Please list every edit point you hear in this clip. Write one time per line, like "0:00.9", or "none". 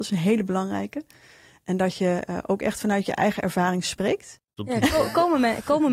0:04.6